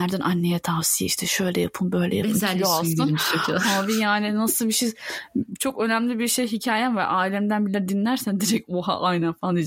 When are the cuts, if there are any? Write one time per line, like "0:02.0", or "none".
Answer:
none